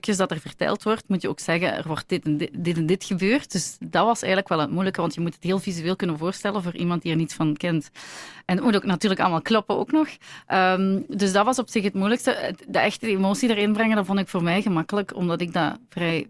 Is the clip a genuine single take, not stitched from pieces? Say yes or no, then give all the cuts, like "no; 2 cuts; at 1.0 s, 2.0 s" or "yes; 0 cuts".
yes; 0 cuts